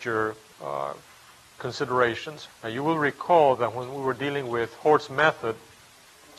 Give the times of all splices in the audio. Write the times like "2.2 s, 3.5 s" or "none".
2.5 s